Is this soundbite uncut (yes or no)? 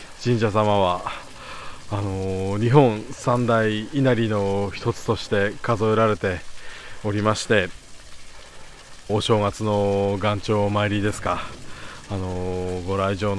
no